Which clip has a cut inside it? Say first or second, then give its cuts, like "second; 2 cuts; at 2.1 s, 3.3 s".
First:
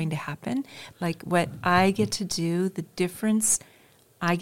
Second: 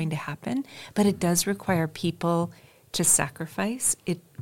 first; 1 cut; at 0.9 s